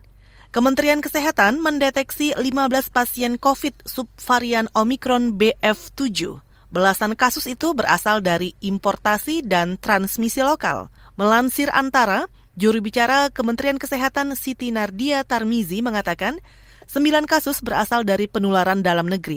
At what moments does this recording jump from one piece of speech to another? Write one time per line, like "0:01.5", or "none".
none